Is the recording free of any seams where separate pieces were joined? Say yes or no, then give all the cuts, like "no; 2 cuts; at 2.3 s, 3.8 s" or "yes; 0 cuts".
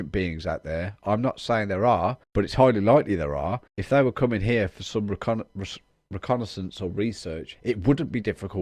no; 2 cuts; at 2.2 s, 3.7 s